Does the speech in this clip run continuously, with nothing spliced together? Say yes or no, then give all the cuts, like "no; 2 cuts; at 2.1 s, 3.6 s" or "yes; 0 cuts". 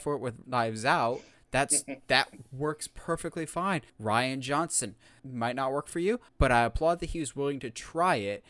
no; 3 cuts; at 3.9 s, 5.2 s, 6.3 s